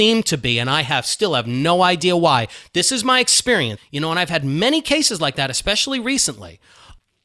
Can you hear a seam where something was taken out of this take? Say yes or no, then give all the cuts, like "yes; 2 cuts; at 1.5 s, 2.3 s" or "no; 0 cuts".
yes; 1 cut; at 3.8 s